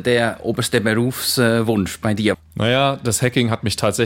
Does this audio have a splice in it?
yes; 1 cut; at 2.3 s

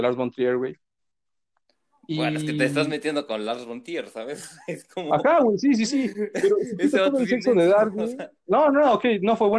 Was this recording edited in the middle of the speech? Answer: no; 0 cuts

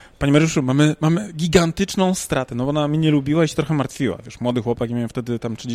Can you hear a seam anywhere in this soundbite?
no; 0 cuts

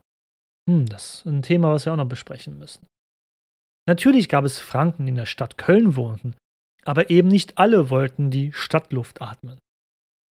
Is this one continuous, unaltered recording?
yes; 0 cuts

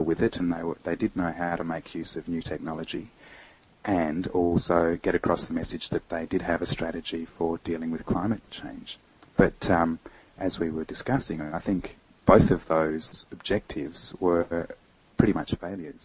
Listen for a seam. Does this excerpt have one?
no; 0 cuts

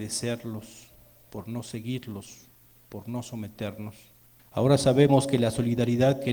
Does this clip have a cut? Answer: yes; 1 cut; at 4.4 s

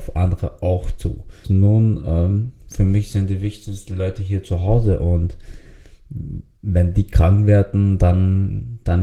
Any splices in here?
yes; 1 cut; at 1.4 s

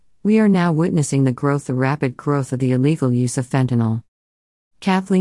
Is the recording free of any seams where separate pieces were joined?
yes; 0 cuts

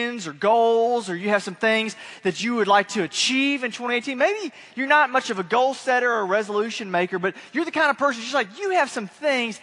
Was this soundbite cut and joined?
no; 0 cuts

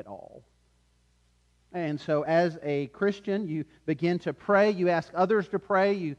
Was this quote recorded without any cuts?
yes; 0 cuts

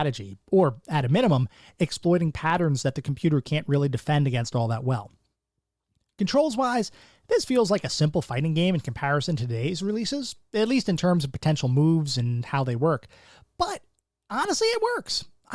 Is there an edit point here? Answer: no; 0 cuts

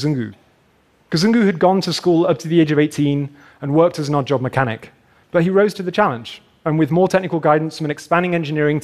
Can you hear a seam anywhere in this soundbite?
yes; 1 cut; at 5.2 s

